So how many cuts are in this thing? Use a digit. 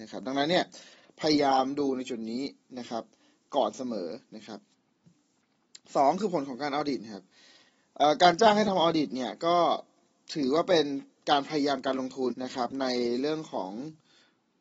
1